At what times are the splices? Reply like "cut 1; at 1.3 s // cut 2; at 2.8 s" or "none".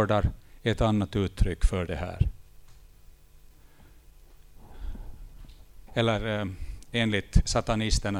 cut 1; at 5.9 s